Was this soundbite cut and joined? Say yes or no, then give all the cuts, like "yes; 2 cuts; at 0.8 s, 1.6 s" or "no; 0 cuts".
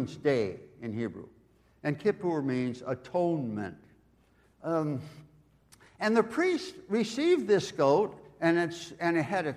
yes; 1 cut; at 4.4 s